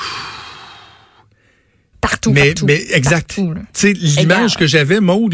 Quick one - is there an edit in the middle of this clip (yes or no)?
yes